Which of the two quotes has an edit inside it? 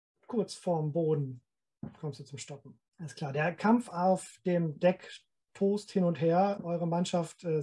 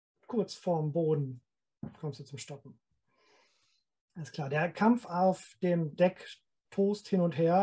first; 2 cuts; at 2.9 s, 6.6 s

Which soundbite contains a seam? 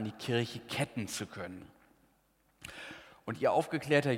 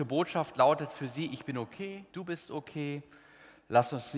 second; 1 cut; at 2.1 s

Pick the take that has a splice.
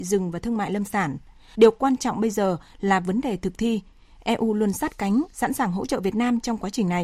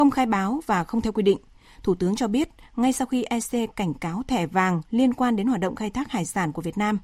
first; 1 cut; at 1.5 s

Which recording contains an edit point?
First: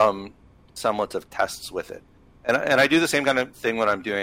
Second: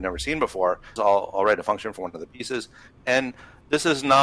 second; 2 cuts; at 1.0 s, 3.0 s

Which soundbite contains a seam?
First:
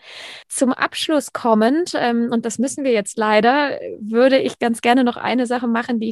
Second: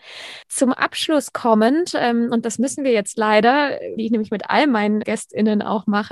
second; 2 cuts; at 4.0 s, 5.0 s

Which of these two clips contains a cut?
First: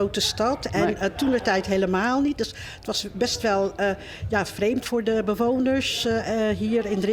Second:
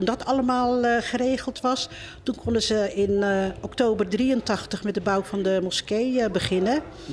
first; 1 cut; at 4.8 s

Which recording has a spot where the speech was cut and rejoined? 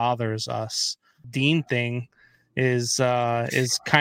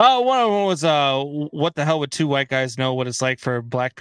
first; 1 cut; at 1.2 s

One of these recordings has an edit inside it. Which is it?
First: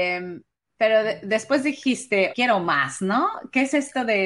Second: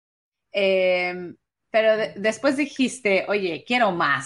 first; 1 cut; at 2.3 s

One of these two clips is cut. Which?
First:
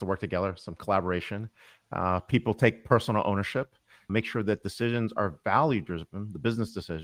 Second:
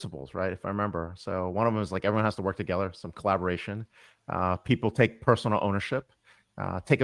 first; 1 cut; at 4.1 s

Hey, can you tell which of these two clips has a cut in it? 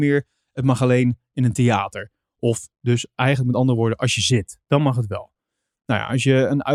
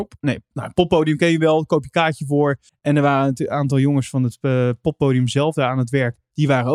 second; 1 cut; at 2.7 s

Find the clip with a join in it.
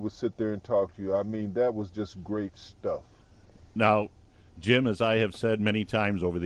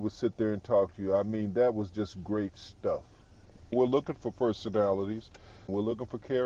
second; 1 cut; at 3.7 s

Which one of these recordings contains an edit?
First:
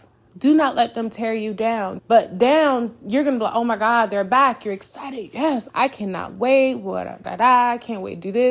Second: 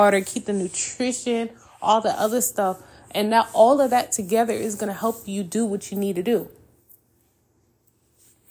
first; 3 cuts; at 2.0 s, 5.7 s, 7.2 s

